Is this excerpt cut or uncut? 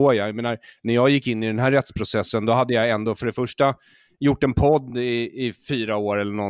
uncut